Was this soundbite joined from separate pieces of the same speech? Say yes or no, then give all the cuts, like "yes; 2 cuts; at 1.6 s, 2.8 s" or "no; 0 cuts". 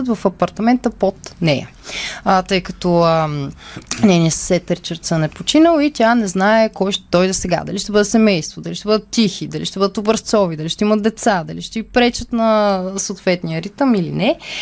no; 0 cuts